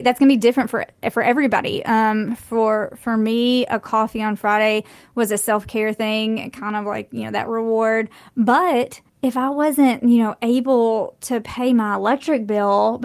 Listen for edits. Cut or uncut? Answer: cut